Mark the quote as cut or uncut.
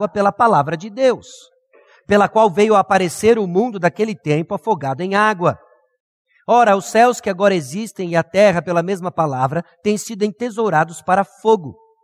uncut